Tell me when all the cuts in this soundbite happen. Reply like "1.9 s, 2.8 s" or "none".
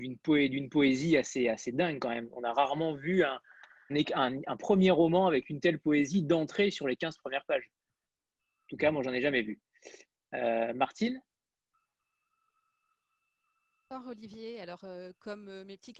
3.9 s